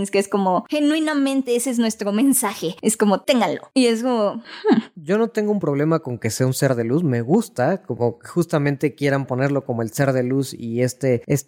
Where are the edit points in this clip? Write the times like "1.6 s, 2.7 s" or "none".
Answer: none